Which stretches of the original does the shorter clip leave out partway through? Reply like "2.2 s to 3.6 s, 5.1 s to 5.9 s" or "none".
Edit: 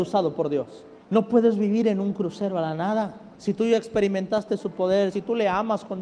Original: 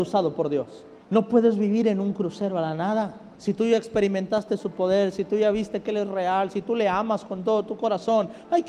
5.1 s to 6.5 s